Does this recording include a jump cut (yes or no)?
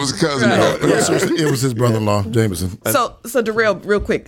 yes